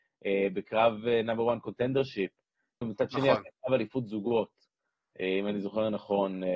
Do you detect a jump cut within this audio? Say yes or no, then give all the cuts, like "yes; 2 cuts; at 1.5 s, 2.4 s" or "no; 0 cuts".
yes; 1 cut; at 2.8 s